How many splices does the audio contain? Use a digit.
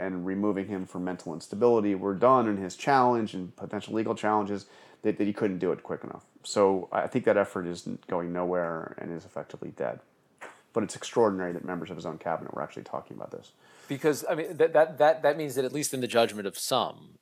0